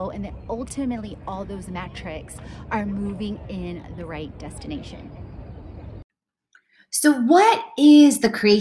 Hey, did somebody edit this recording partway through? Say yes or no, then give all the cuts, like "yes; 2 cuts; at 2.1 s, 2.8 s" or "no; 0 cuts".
no; 0 cuts